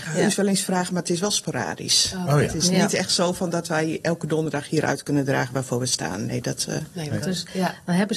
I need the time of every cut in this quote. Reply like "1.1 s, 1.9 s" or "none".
4.0 s, 7.2 s